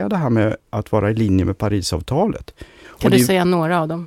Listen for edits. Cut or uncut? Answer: cut